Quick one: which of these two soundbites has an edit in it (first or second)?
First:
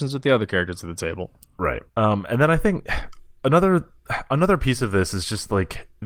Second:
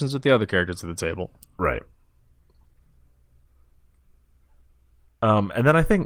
first